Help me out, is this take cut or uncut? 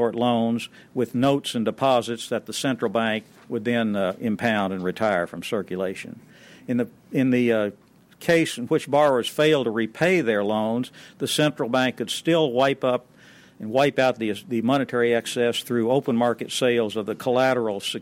uncut